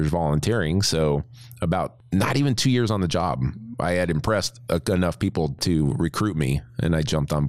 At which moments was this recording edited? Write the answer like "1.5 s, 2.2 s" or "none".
none